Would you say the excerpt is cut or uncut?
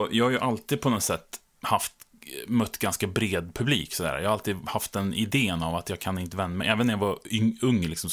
uncut